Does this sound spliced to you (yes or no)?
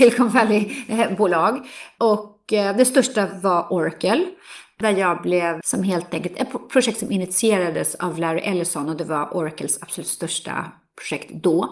yes